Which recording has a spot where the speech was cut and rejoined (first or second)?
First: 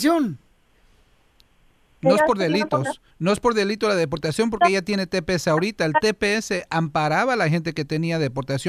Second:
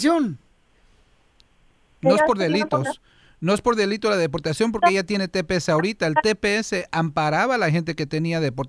first